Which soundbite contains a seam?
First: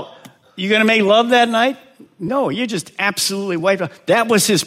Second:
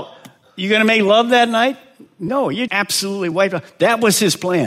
second; 1 cut; at 2.7 s

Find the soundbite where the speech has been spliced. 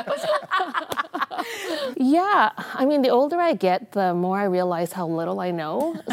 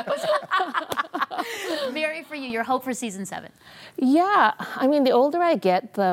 first; 1 cut; at 1.9 s

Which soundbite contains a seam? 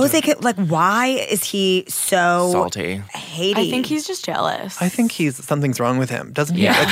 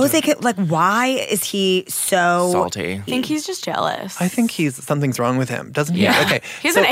second; 1 cut; at 3.1 s

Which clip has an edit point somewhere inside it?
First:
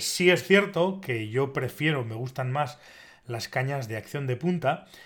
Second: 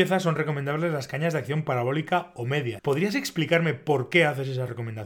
second; 1 cut; at 2.8 s

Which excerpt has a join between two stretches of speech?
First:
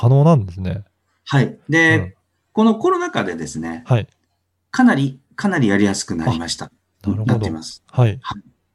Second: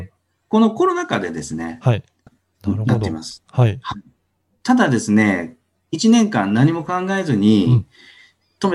second; 1 cut; at 2.3 s

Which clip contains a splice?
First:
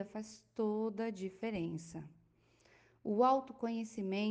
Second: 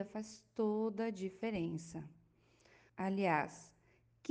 second; 1 cut; at 2.9 s

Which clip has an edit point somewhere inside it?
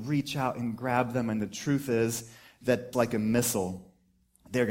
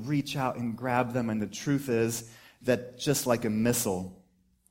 first; 1 cut; at 2.9 s

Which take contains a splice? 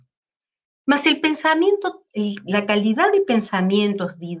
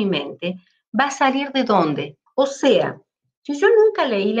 second; 1 cut; at 2.3 s

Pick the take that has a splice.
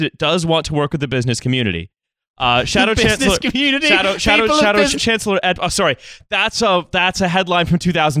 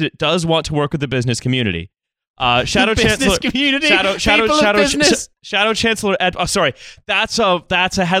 first; 1 cut; at 5.0 s

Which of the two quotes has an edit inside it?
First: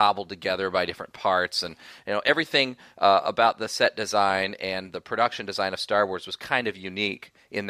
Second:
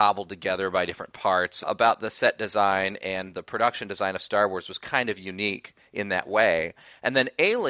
second; 1 cut; at 1.6 s

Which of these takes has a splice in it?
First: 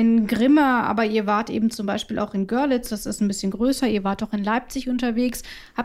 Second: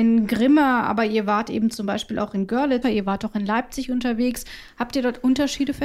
second; 1 cut; at 2.8 s

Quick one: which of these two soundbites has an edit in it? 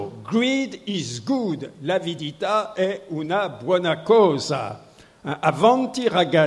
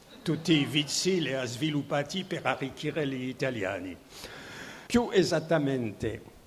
second; 1 cut; at 4.9 s

